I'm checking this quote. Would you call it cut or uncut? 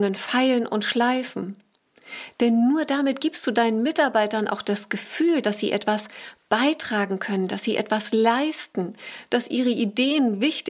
uncut